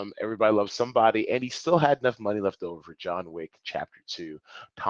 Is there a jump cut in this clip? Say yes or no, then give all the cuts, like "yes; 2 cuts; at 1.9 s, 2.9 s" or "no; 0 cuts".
no; 0 cuts